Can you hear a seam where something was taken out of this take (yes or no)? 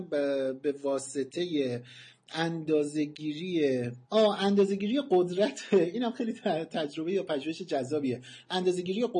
yes